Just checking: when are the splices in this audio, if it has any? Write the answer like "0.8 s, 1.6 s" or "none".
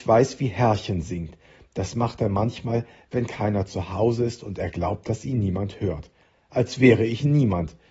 none